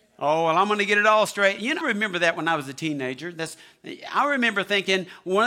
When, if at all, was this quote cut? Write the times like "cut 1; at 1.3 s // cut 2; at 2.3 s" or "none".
cut 1; at 1.8 s